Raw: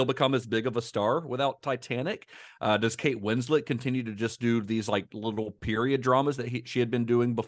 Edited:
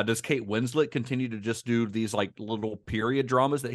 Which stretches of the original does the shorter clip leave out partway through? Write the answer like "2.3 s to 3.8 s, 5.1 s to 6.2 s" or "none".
none